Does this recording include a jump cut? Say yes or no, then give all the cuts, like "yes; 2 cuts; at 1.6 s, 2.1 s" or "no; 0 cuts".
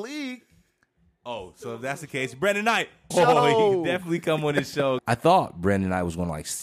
yes; 2 cuts; at 3.1 s, 5.0 s